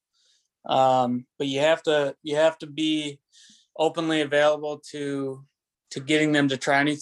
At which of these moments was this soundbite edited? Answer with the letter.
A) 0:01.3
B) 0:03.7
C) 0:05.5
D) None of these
A